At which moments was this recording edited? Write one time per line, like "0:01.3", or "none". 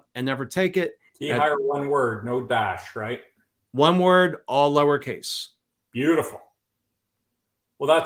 0:01.1